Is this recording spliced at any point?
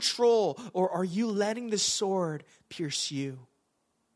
no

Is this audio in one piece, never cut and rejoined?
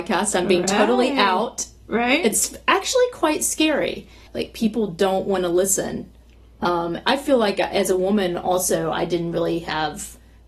no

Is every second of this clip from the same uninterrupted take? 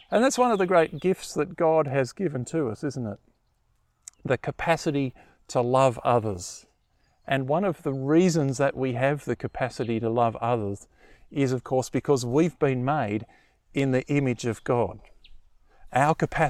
yes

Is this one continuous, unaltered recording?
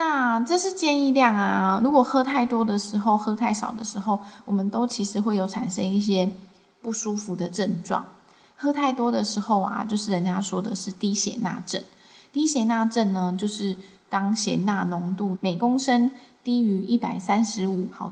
yes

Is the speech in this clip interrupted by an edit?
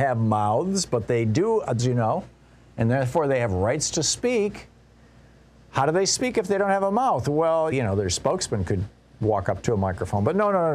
yes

